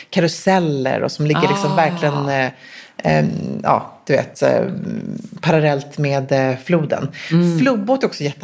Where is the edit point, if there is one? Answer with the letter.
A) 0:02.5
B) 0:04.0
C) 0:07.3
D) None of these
D